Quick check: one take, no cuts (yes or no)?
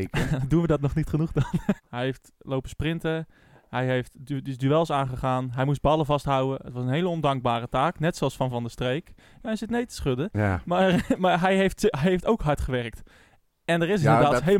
no